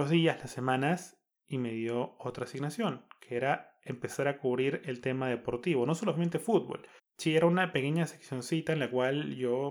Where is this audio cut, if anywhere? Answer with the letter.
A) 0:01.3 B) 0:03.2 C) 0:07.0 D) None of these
C